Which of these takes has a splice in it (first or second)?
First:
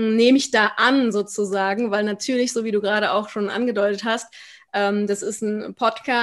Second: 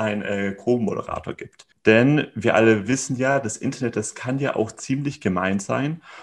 second